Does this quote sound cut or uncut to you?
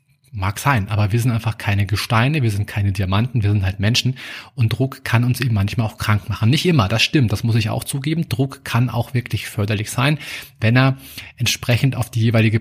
uncut